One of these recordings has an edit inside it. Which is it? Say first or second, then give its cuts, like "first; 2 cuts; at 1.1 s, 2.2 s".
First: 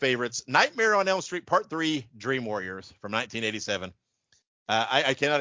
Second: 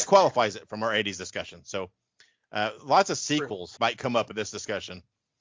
second; 1 cut; at 3.8 s